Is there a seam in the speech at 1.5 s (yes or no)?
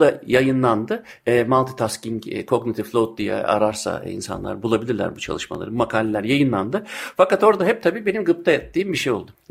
no